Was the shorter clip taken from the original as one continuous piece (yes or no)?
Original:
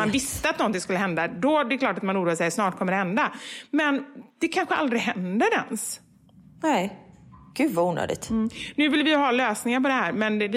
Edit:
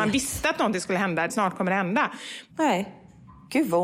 no